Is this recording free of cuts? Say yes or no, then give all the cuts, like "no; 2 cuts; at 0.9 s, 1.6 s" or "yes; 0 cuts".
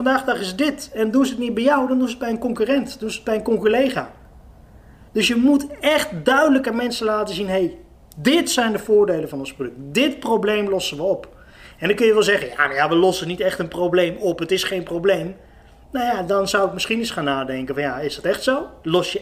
yes; 0 cuts